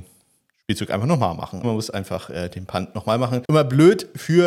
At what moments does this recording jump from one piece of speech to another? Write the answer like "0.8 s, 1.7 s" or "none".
1.6 s